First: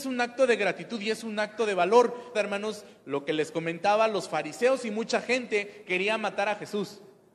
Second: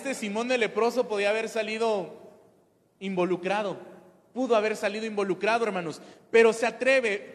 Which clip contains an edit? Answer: first; 1 cut; at 2.3 s

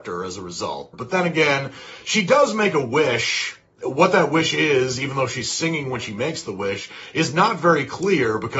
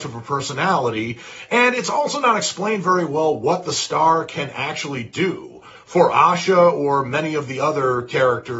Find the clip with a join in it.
first; 1 cut; at 0.9 s

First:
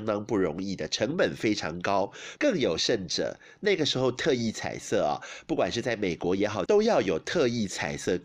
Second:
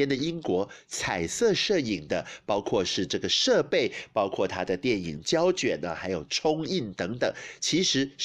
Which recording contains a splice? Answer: first; 2 cuts; at 2.4 s, 6.7 s

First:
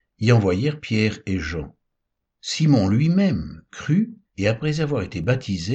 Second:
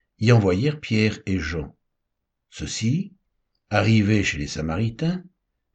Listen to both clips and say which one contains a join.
first; 2 cuts; at 2.3 s, 4.2 s

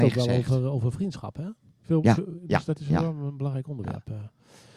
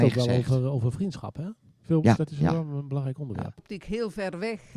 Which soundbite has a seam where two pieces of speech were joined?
second; 2 cuts; at 2.2 s, 3.6 s

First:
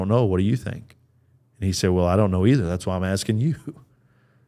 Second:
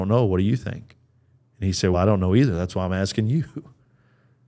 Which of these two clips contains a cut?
second; 1 cut; at 1.9 s

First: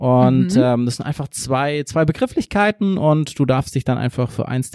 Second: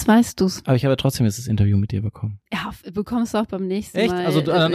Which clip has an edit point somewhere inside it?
second; 1 cut; at 2.5 s

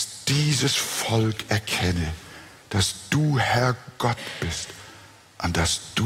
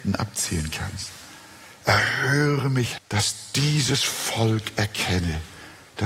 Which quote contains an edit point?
second; 1 cut; at 3.0 s

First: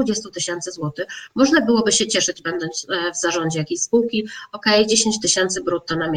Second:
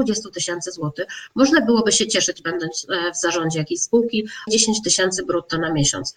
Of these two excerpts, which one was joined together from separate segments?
second; 1 cut; at 4.5 s

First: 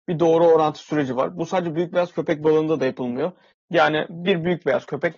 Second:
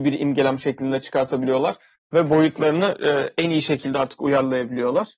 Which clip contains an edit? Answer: first; 1 cut; at 3.6 s

